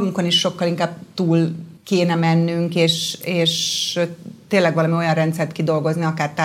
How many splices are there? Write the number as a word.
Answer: one